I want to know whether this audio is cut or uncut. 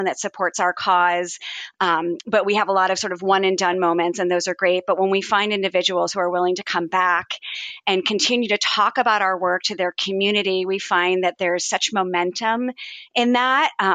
uncut